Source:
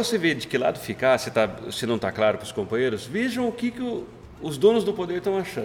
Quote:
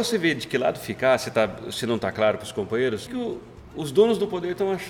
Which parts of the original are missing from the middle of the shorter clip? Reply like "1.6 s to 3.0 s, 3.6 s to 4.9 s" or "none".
3.1 s to 3.7 s